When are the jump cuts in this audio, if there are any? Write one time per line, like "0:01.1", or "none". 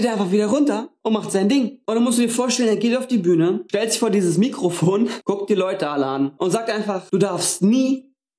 0:01.8